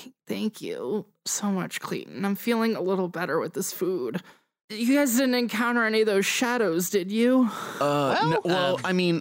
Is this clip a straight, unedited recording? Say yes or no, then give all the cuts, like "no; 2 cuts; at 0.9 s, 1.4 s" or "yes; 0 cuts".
yes; 0 cuts